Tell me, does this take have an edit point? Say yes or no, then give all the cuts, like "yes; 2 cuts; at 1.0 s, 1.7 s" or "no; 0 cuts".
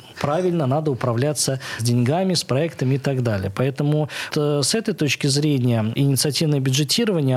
yes; 2 cuts; at 4.3 s, 5.9 s